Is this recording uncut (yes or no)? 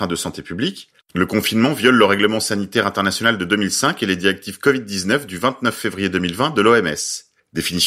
no